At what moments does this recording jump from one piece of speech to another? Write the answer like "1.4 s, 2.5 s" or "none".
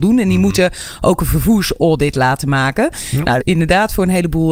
3.4 s